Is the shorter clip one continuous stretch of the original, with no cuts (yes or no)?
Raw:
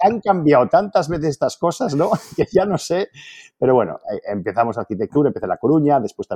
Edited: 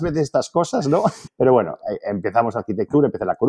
no